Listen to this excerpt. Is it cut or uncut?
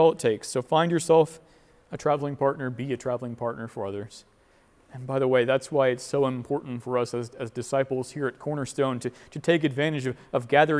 uncut